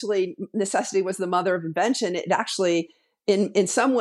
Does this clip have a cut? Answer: no; 0 cuts

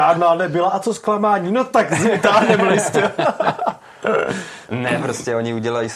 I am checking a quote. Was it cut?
no; 0 cuts

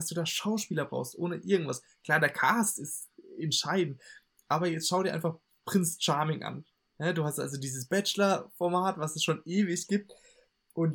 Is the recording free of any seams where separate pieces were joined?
yes; 0 cuts

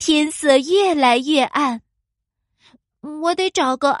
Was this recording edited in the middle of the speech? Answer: no; 0 cuts

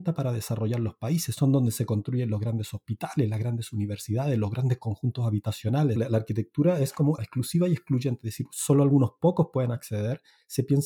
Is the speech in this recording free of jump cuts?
no; 2 cuts; at 6.0 s, 7.2 s

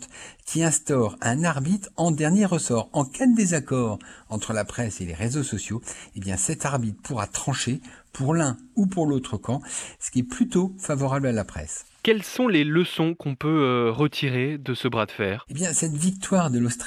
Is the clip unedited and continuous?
yes; 0 cuts

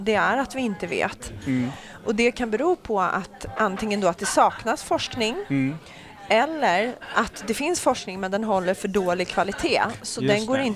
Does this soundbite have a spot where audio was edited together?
no; 0 cuts

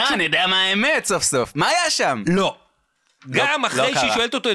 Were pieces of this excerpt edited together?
no; 0 cuts

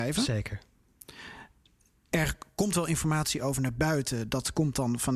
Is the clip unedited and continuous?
yes; 0 cuts

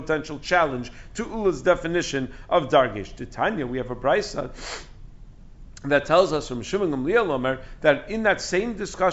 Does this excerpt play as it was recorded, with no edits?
yes; 0 cuts

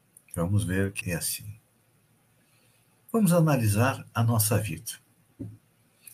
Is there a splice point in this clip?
yes; 1 cut; at 1.0 s

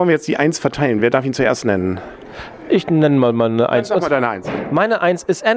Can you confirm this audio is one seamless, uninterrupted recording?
yes; 0 cuts

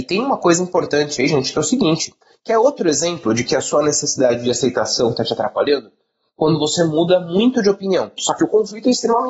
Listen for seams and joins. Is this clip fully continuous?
no; 1 cut; at 8.2 s

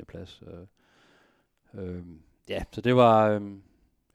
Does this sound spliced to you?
no; 0 cuts

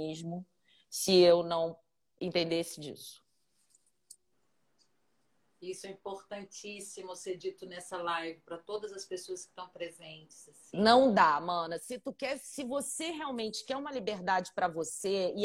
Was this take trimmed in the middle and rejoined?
no; 0 cuts

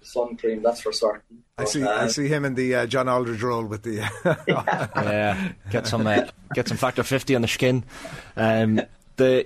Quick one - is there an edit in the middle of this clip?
no; 0 cuts

